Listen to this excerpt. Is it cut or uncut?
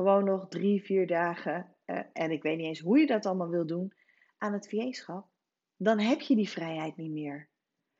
uncut